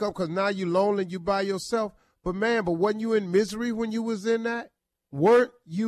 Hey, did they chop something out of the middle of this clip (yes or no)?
no